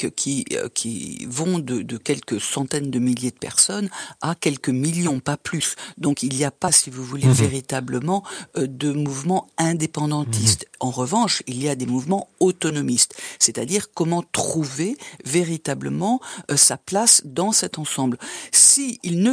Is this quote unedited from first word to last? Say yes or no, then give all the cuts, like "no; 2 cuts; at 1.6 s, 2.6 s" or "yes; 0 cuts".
yes; 0 cuts